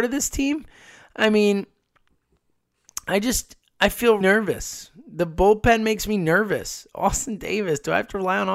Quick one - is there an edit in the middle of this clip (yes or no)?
yes